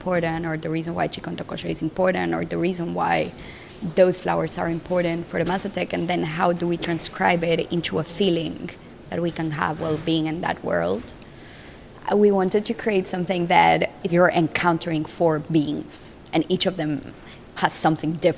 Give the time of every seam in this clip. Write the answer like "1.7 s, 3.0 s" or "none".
14.1 s